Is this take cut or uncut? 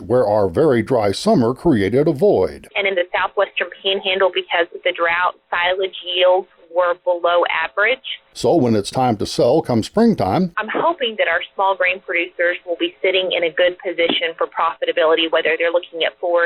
cut